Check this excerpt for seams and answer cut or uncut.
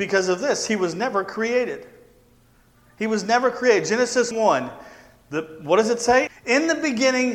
cut